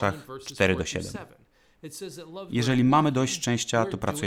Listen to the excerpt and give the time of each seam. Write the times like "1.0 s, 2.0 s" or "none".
2.5 s